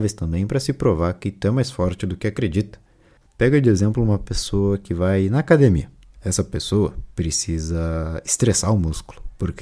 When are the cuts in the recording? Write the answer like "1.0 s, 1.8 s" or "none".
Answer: 3.2 s